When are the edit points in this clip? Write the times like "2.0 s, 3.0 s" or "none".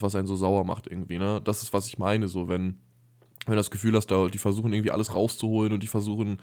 none

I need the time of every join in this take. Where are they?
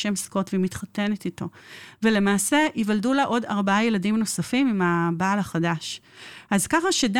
none

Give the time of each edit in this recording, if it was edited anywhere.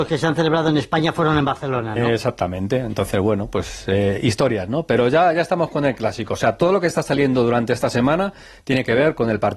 none

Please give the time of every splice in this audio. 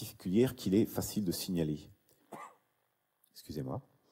2.2 s

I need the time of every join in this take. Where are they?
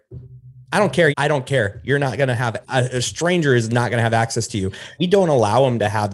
1.1 s, 2.6 s, 5.0 s

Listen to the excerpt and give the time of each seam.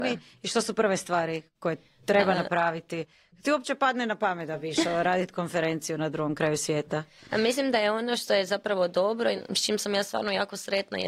none

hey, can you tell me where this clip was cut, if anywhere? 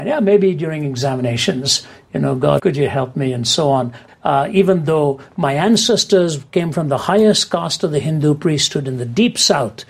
2.6 s, 4.1 s

